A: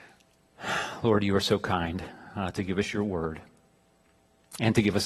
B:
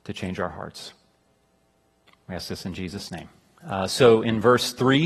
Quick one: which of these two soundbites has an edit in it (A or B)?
B